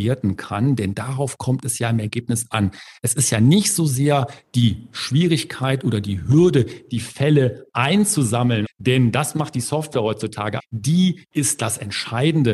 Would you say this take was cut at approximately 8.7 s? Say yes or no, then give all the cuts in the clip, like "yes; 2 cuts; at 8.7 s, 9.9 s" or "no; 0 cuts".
yes; 2 cuts; at 8.7 s, 10.6 s